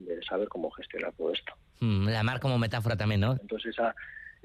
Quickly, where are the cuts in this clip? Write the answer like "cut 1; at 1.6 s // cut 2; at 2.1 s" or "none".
cut 1; at 3.4 s